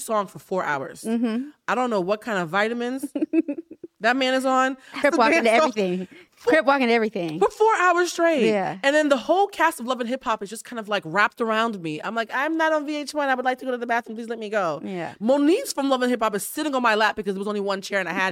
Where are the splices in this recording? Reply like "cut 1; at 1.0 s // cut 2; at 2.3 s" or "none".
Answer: cut 1; at 5.0 s